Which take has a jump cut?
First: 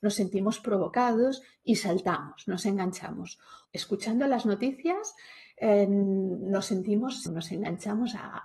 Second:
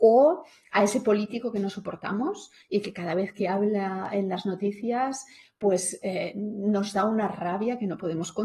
first; 2 cuts; at 3.7 s, 7.3 s

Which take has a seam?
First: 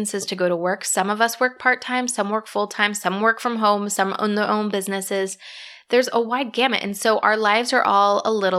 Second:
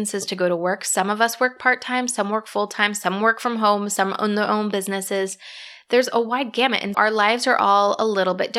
second; 1 cut; at 6.9 s

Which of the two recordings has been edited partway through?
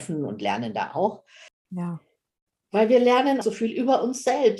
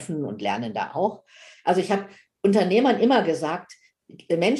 first; 2 cuts; at 1.5 s, 3.4 s

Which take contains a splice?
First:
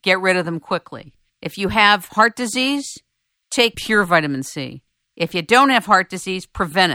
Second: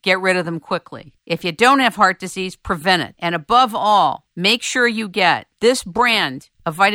second; 1 cut; at 1.2 s

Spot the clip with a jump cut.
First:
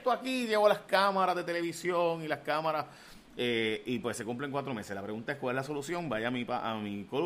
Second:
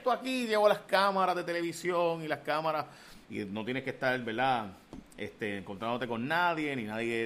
second; 1 cut; at 3.2 s

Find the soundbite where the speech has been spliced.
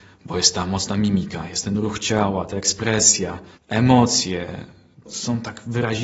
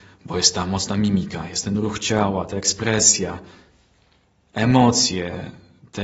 first; 2 cuts; at 3.6 s, 5.1 s

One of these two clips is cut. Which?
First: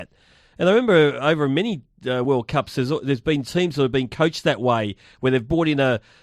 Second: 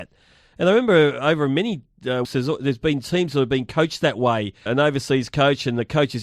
second; 2 cuts; at 2.2 s, 4.7 s

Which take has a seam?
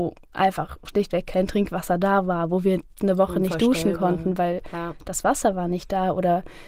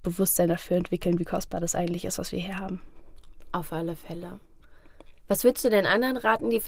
second; 1 cut; at 5.2 s

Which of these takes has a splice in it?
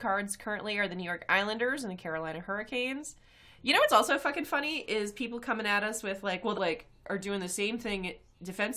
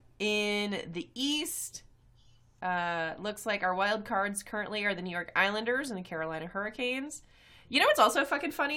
first; 1 cut; at 6.5 s

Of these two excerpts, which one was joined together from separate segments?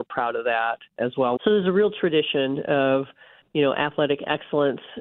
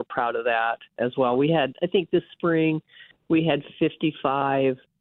first; 1 cut; at 1.4 s

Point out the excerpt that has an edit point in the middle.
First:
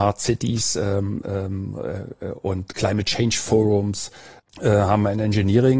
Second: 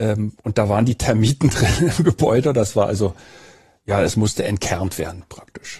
first; 1 cut; at 4.4 s

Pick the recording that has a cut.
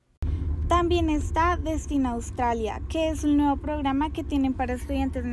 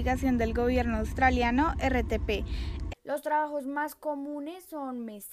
second; 1 cut; at 2.9 s

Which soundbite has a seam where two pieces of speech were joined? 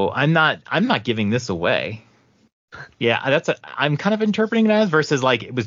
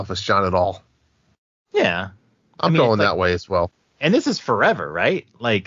first; 1 cut; at 2.9 s

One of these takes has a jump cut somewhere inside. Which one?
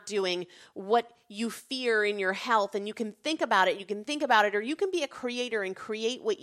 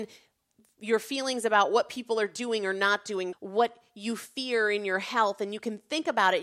second; 1 cut; at 3.3 s

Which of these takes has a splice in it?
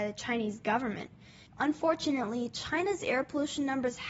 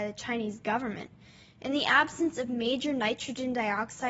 first; 1 cut; at 1.5 s

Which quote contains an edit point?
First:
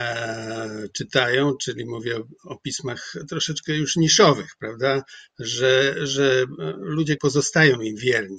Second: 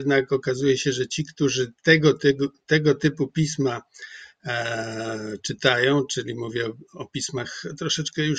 first; 2 cuts; at 5.3 s, 7.2 s

